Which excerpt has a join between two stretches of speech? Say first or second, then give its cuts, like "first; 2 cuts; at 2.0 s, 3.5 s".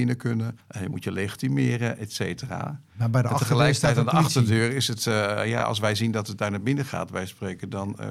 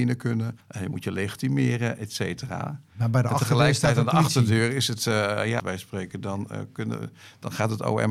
second; 1 cut; at 5.6 s